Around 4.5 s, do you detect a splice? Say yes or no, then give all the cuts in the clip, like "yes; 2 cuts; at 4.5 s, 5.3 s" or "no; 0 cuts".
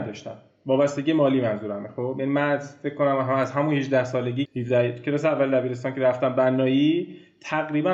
yes; 1 cut; at 4.5 s